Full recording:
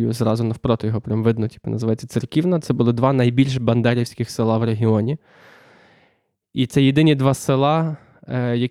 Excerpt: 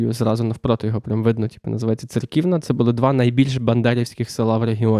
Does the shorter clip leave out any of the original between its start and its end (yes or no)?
no